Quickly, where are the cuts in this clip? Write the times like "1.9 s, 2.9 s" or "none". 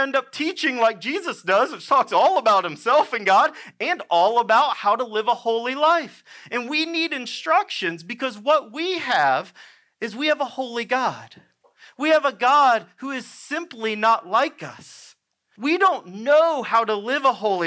15.6 s